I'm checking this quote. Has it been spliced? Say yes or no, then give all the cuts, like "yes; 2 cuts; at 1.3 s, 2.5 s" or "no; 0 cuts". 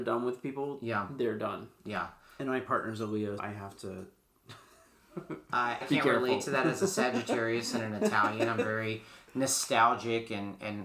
yes; 2 cuts; at 3.4 s, 5.8 s